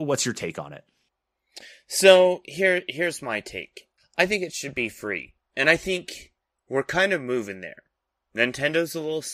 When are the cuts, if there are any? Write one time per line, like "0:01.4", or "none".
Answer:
none

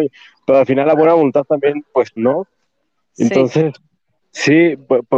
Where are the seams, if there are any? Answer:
0:02.2
0:04.2

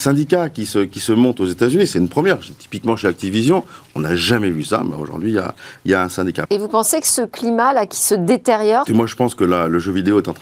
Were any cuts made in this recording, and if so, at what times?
0:06.4
0:08.9

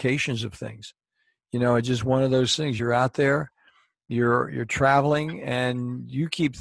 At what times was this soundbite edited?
none

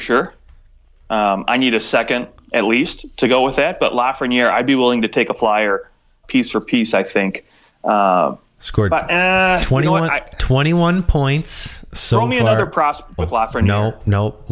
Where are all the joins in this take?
0:06.2
0:13.2

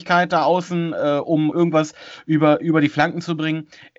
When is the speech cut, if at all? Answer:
0:01.5

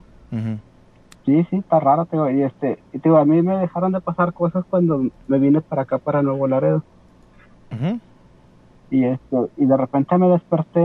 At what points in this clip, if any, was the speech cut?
0:01.1
0:07.6

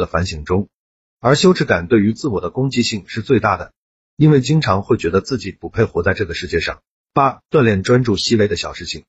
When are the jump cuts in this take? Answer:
0:01.0
0:07.0

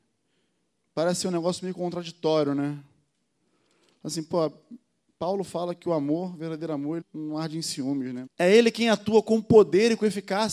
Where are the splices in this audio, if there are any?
0:07.0
0:08.3

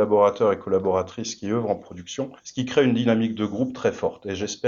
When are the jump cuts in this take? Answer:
0:02.4

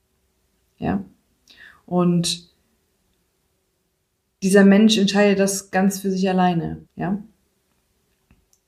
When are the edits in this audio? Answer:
0:06.9

